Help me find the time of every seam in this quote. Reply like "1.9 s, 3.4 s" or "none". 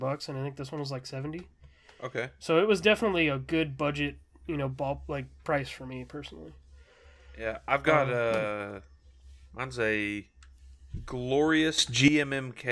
none